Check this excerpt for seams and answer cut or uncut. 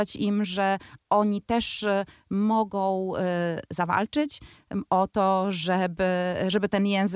uncut